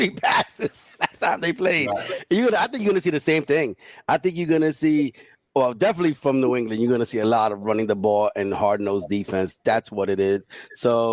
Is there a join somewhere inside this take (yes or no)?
no